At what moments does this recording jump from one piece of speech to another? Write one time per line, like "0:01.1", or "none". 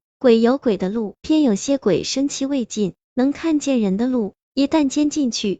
0:01.2

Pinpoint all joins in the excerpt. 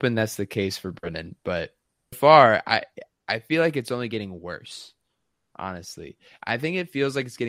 0:02.1

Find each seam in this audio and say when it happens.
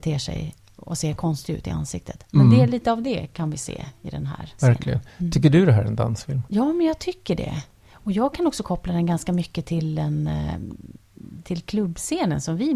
none

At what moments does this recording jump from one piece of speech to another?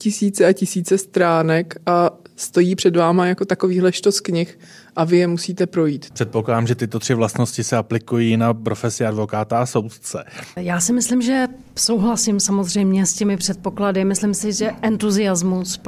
0:06.1
0:10.6

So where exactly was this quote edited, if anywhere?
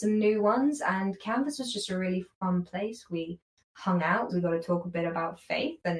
0:04.3

